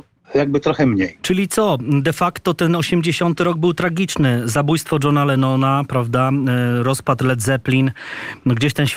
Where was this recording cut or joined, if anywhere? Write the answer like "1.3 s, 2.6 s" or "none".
1.2 s